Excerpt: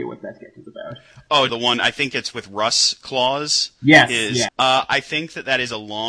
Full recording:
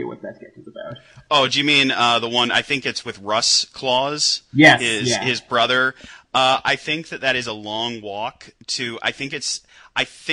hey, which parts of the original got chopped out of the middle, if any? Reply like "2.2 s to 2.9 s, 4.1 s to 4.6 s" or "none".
1.5 s to 2.2 s, 5.2 s to 6.2 s